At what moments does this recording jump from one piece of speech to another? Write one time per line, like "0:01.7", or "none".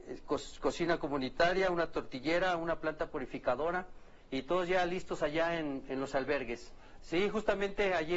0:07.0

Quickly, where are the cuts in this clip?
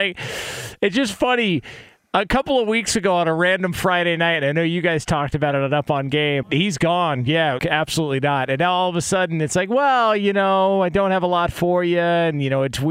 0:06.4
0:07.6

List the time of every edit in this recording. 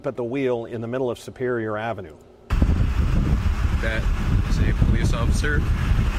none

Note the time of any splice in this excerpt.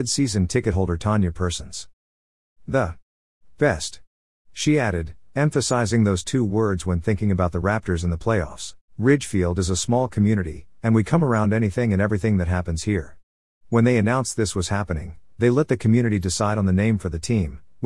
0:08.9

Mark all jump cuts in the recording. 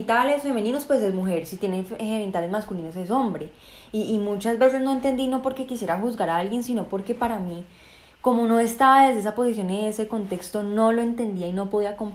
none

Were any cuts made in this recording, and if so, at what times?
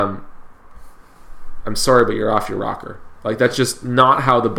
none

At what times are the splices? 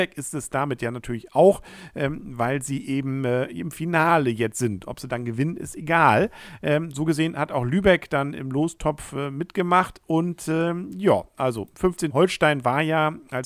0:12.1

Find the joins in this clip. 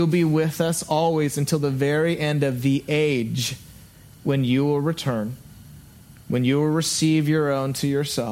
none

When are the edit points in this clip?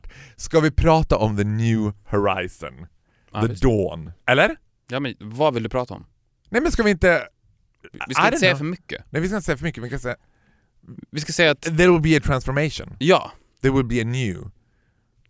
none

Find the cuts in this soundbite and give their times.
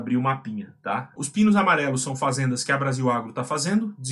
0:01.2

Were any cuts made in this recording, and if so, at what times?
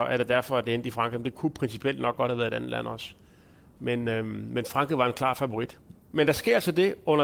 0:06.0

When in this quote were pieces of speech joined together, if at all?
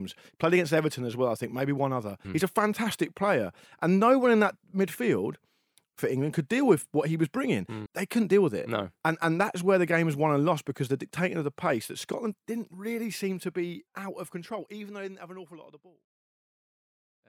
0:02.2
0:07.9
0:13.9

